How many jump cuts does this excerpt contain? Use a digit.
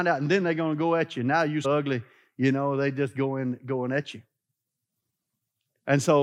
1